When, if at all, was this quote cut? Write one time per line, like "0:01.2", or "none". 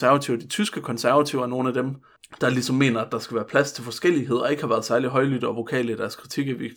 none

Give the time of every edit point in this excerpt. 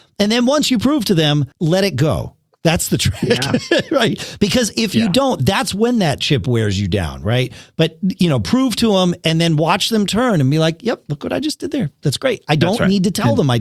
0:01.5

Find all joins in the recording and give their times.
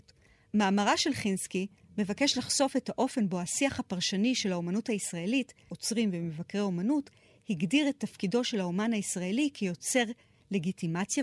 0:05.7

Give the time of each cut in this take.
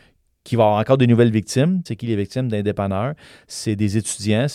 0:01.9

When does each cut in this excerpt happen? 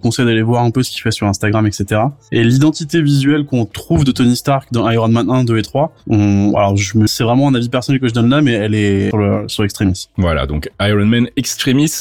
0:07.1
0:09.1

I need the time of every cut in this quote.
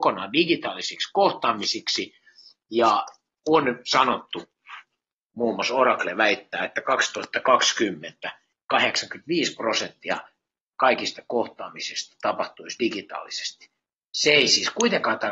none

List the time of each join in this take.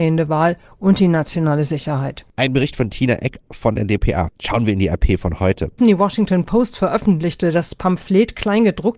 0:04.3
0:05.8

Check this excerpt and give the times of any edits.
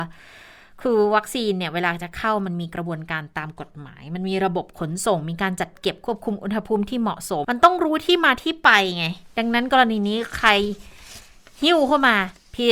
0:07.4

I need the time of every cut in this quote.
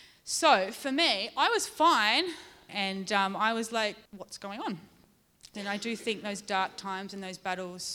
0:02.7
0:04.1
0:05.5

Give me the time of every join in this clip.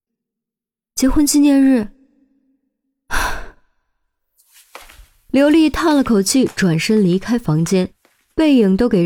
none

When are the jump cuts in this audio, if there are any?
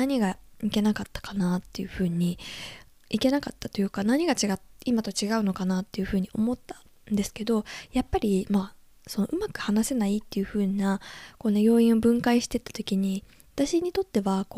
none

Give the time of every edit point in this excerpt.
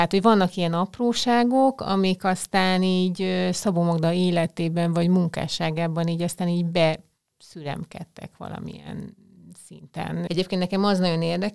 0:10.3

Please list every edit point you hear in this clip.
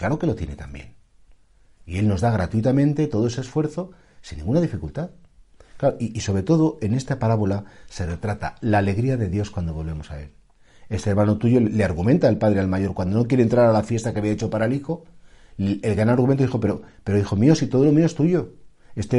none

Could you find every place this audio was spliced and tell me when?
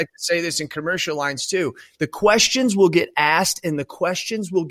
none

